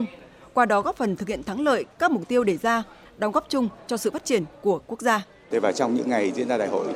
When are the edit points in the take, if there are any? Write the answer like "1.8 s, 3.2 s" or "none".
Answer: 3.0 s, 5.5 s